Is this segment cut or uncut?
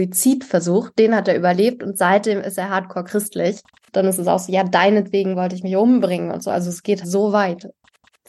cut